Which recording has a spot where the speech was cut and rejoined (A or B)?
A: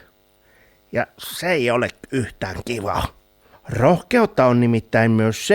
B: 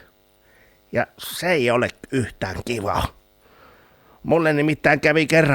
A